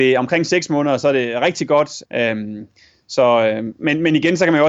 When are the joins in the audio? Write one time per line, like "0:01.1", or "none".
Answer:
0:02.1